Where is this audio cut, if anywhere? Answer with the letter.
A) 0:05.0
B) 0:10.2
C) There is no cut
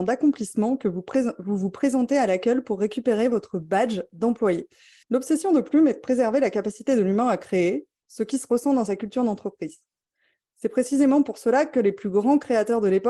A